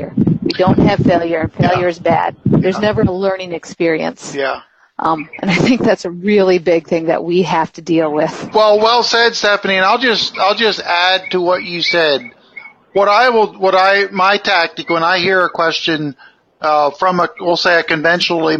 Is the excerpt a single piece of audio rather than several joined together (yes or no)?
no